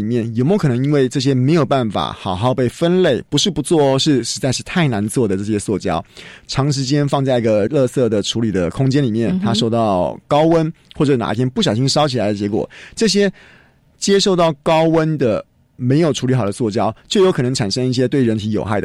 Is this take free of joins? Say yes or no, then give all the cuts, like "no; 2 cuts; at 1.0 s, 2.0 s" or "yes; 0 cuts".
no; 1 cut; at 7.7 s